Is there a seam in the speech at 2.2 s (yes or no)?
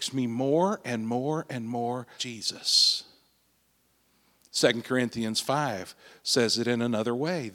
yes